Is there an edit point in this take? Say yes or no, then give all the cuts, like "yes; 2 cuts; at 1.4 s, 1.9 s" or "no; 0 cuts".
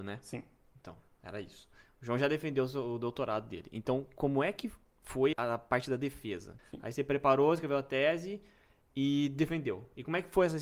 yes; 2 cuts; at 5.3 s, 6.6 s